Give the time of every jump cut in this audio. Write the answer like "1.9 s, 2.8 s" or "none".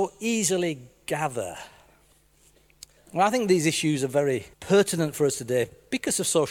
3.0 s, 4.5 s